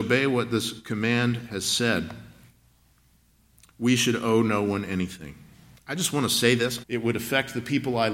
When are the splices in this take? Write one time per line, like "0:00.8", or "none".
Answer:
0:05.7
0:06.8